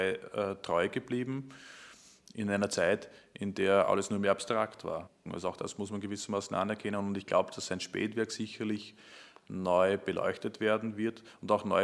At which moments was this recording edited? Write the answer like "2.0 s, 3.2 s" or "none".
5.3 s